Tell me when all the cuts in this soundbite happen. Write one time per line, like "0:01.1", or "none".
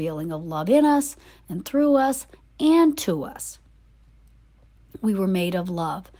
none